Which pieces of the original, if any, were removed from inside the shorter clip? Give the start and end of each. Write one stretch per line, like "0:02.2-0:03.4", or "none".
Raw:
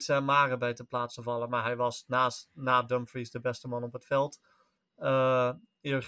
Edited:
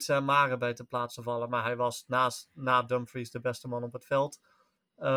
none

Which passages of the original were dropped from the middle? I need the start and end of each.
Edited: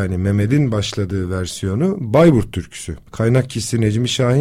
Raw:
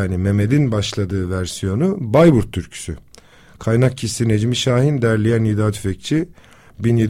0:03.1-0:03.5

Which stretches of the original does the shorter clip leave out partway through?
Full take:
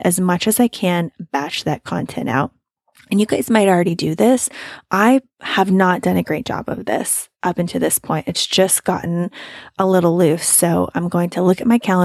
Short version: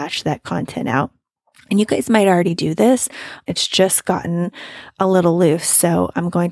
0:04.9-0:08.2

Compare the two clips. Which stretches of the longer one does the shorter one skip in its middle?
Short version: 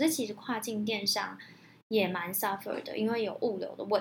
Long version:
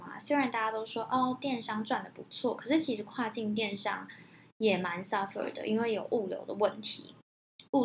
none

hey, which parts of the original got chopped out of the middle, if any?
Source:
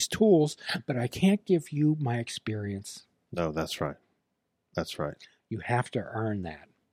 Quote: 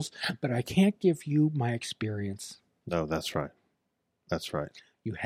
none

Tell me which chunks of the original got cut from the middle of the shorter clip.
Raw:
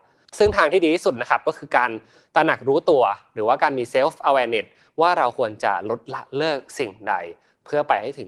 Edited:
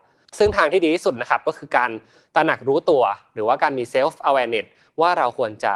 none

